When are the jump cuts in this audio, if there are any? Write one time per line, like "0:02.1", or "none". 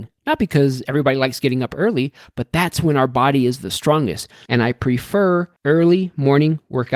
0:04.5
0:05.6